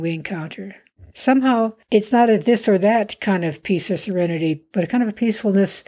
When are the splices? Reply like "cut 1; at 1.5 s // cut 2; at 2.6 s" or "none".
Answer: cut 1; at 1.1 s // cut 2; at 4.7 s

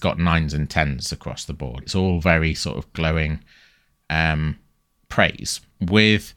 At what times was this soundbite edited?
cut 1; at 1.8 s

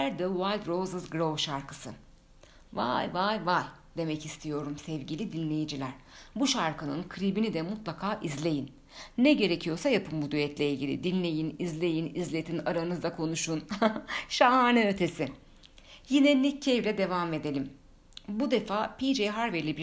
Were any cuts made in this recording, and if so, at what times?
none

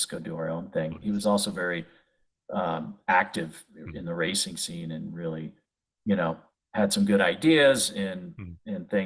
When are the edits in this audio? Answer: cut 1; at 1.0 s

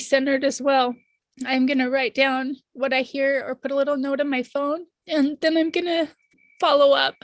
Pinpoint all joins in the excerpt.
cut 1; at 1.2 s // cut 2; at 5.0 s

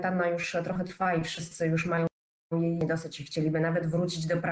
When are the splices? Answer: none

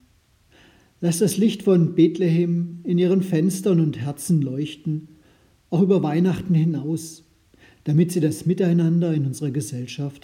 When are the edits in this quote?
none

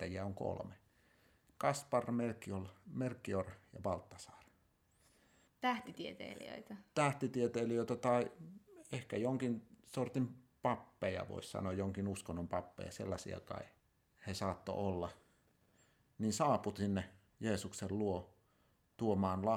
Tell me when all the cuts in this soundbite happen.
cut 1; at 5.5 s

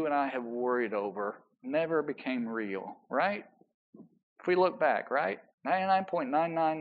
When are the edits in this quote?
cut 1; at 5.5 s

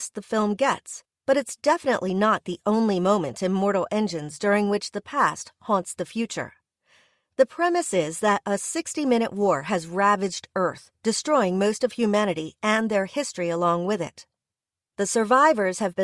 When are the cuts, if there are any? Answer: none

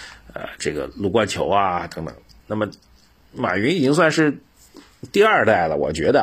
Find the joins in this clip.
none

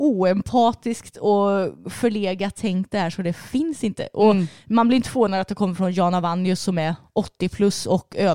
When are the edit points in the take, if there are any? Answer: none

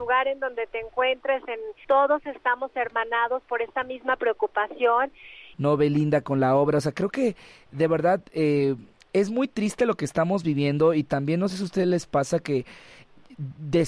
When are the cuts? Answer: cut 1; at 1.8 s // cut 2; at 5.5 s

